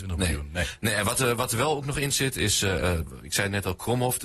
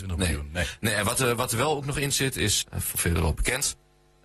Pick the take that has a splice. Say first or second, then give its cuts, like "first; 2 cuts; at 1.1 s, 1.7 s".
second; 1 cut; at 2.6 s